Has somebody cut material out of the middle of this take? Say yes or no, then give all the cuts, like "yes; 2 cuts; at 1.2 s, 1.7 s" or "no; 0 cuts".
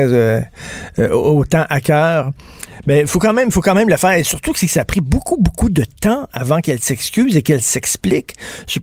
no; 0 cuts